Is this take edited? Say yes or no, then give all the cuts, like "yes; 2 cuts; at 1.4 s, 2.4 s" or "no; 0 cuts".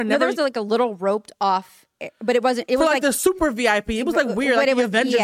no; 0 cuts